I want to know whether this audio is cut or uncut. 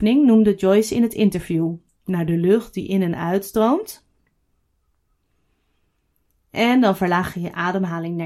cut